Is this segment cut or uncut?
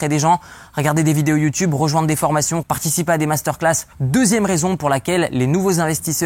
cut